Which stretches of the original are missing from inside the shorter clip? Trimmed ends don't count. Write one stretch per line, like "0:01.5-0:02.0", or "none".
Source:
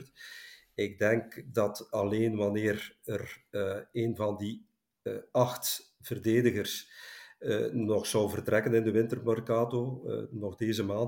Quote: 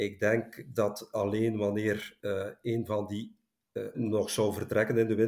0:03.0-0:03.5
0:05.2-0:07.7